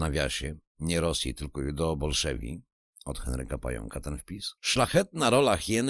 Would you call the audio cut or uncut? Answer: cut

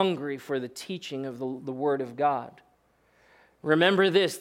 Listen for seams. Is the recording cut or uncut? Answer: uncut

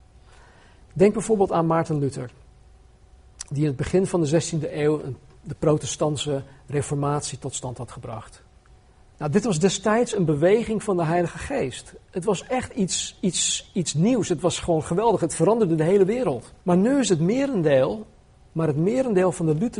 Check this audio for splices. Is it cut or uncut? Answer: cut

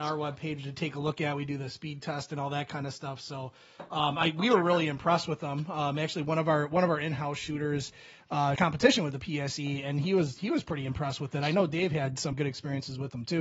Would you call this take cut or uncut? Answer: cut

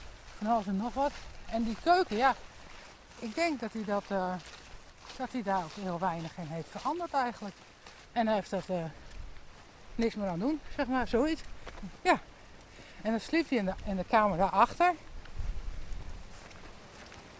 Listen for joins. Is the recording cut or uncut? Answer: cut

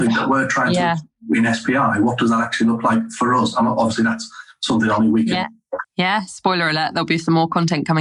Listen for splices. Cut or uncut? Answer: cut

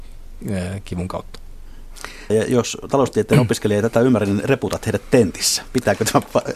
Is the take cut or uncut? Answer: cut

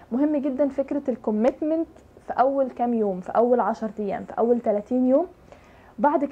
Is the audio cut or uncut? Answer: uncut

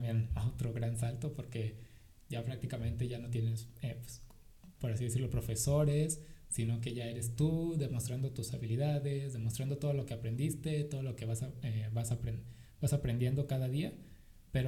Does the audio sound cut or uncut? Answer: uncut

